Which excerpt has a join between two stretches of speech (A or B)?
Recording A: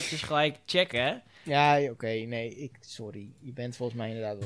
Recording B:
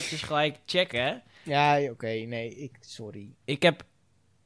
B